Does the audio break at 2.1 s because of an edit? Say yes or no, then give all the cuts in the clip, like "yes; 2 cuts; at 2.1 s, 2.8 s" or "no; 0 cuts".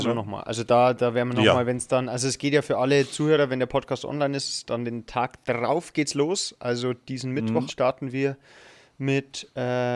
no; 1 cut; at 7.7 s